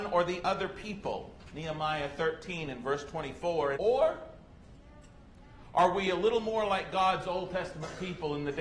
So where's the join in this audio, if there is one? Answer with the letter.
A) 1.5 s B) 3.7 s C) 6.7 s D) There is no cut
B